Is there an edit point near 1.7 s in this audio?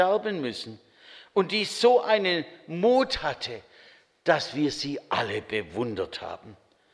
no; 0 cuts

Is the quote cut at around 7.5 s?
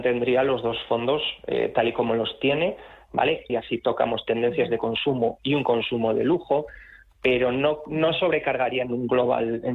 no; 1 cut; at 3.5 s

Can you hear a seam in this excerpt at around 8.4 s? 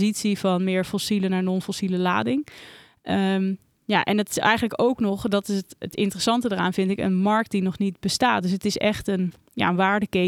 no; 0 cuts

